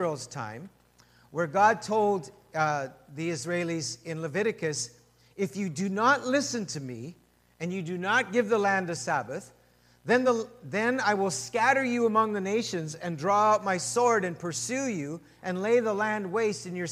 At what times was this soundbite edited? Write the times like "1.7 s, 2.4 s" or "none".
none